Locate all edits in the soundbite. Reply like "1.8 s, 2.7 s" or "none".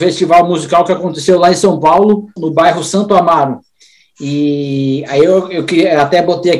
2.4 s